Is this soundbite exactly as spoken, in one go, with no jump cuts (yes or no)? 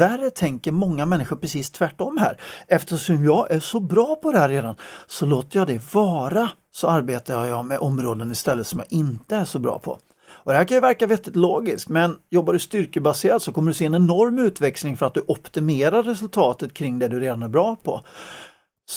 yes